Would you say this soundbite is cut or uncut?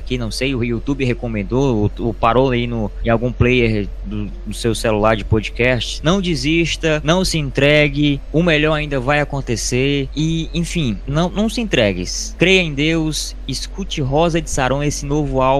uncut